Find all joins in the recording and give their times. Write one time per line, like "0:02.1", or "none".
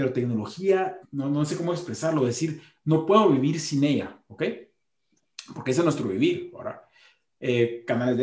0:01.0